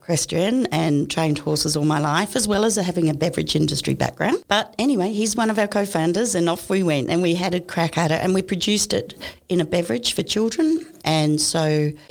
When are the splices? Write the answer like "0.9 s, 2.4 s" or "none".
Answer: 4.4 s, 11.0 s